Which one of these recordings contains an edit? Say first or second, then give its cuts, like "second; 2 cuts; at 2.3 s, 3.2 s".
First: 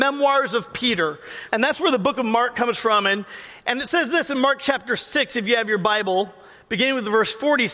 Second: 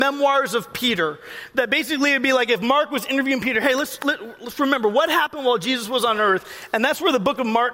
first; 1 cut; at 1.5 s